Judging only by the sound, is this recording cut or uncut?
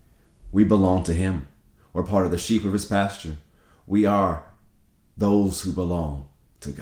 uncut